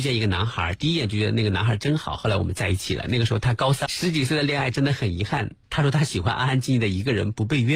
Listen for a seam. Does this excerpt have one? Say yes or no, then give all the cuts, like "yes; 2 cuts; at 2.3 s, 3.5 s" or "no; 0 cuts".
yes; 1 cut; at 3.9 s